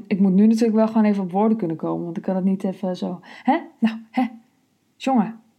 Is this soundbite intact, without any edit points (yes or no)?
yes